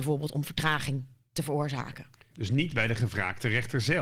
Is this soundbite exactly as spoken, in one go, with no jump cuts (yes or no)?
no